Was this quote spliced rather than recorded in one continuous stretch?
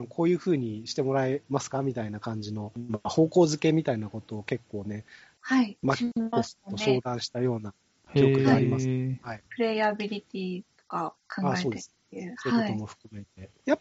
no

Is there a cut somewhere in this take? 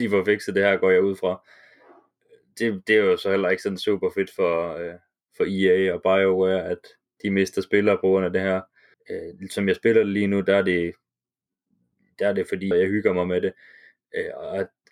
yes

